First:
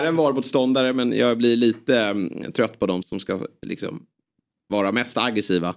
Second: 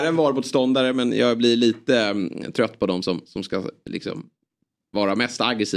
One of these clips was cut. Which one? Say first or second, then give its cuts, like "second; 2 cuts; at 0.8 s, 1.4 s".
first; 1 cut; at 3.0 s